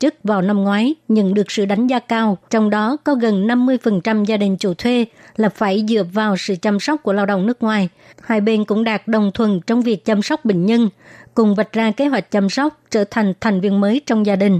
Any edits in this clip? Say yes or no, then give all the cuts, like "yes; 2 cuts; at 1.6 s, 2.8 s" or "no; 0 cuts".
yes; 2 cuts; at 2.5 s, 8.1 s